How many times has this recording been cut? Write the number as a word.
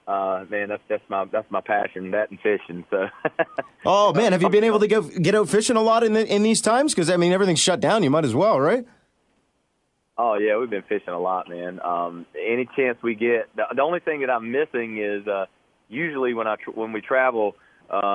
zero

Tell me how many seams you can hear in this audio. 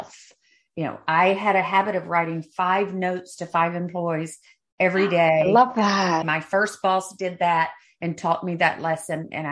one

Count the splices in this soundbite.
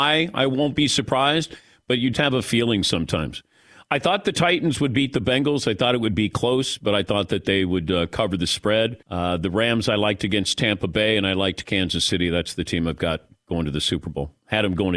two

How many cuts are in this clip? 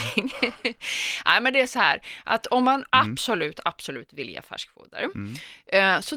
one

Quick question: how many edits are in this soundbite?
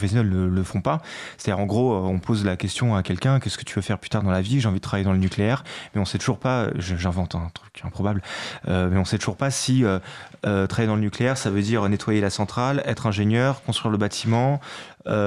zero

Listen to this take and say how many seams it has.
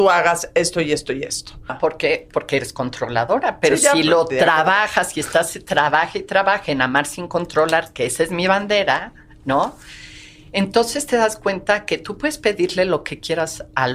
one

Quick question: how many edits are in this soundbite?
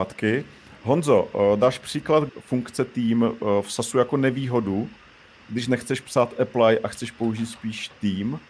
one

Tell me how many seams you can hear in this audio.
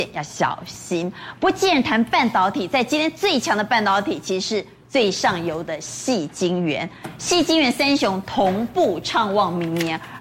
zero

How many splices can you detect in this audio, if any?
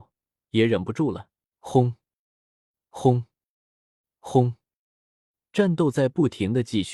one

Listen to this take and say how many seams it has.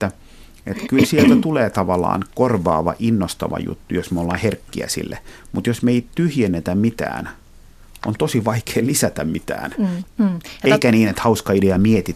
one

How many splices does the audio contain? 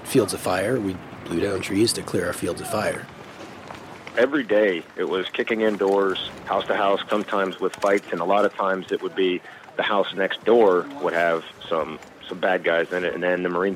one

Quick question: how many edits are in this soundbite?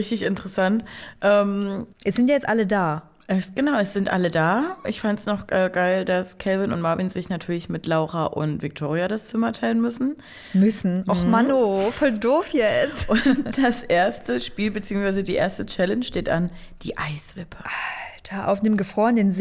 one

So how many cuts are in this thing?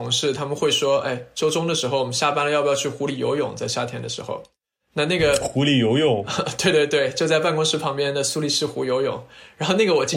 zero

